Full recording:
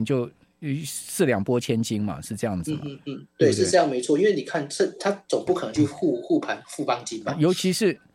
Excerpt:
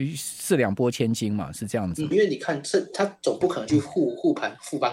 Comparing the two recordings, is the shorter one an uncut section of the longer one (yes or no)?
no